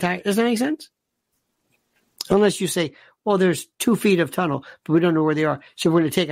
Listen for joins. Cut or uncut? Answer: uncut